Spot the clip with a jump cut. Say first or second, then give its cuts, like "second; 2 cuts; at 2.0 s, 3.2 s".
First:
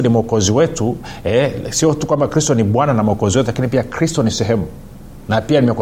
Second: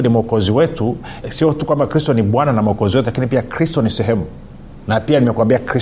second; 1 cut; at 1.2 s